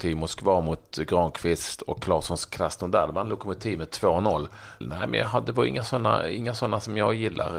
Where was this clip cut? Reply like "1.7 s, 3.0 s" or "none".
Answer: 4.8 s

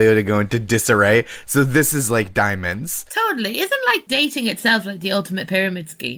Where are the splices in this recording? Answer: none

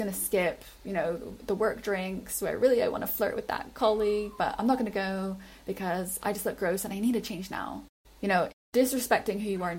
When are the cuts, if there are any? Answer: none

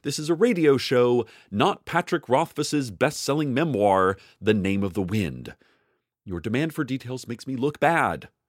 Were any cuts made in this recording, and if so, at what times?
none

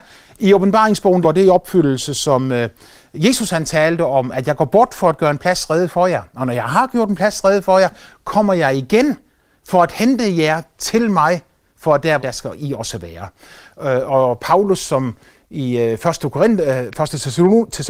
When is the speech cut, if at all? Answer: 1.2 s, 12.2 s

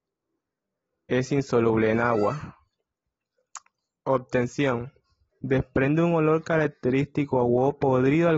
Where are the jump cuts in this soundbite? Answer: 5.3 s

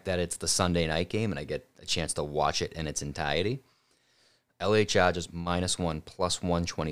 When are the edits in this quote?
4.5 s

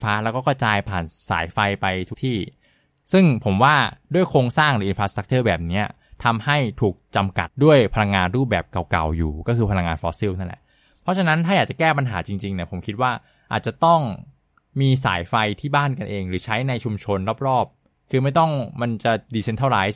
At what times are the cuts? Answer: 2.1 s, 7.5 s

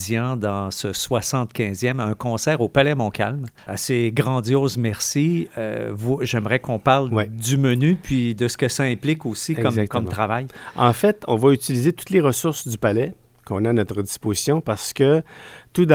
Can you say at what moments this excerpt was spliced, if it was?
none

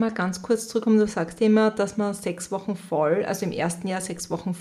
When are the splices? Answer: none

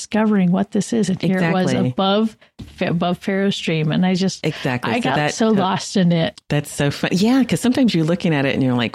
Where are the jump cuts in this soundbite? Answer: 6.4 s

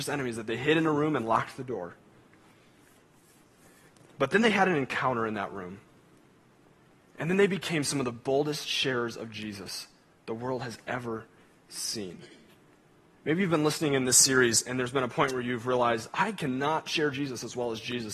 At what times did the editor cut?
none

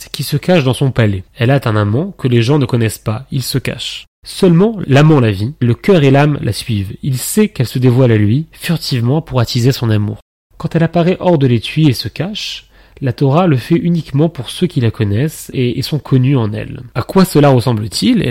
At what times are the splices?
4.0 s, 5.6 s, 10.5 s

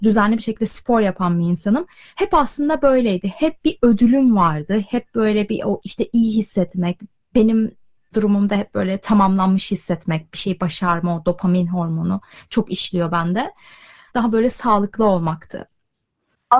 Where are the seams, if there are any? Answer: 14.1 s

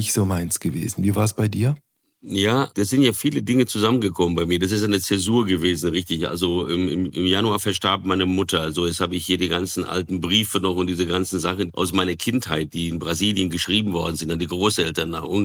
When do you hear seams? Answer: none

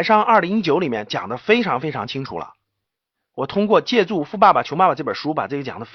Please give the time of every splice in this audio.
none

